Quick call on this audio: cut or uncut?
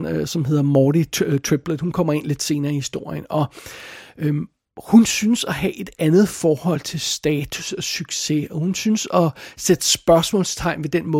uncut